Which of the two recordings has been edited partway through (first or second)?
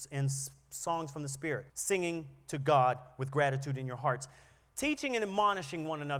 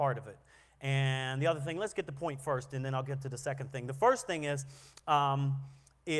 first